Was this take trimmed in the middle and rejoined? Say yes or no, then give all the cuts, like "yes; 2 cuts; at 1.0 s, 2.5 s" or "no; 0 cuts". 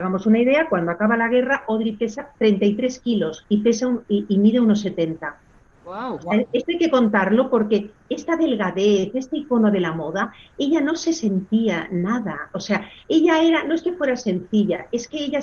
no; 0 cuts